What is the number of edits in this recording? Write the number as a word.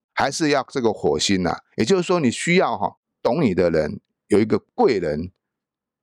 zero